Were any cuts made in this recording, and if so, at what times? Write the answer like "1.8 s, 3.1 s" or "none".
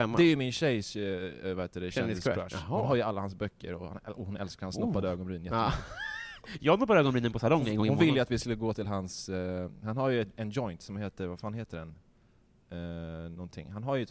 none